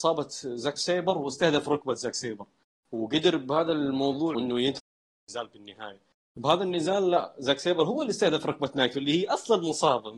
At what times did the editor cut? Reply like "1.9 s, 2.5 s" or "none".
4.3 s